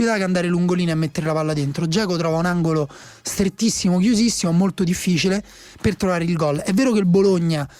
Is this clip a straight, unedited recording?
yes; 0 cuts

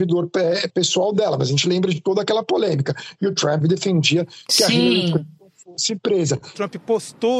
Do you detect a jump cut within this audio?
yes; 1 cut; at 3.6 s

